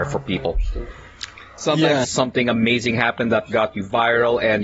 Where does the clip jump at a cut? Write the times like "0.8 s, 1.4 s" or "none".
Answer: 2.0 s